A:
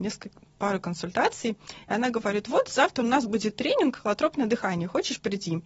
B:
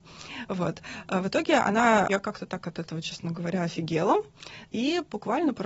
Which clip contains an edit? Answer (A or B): B